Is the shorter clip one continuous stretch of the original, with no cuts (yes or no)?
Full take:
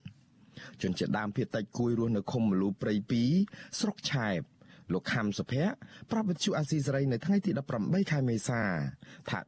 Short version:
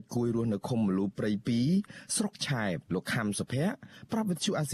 no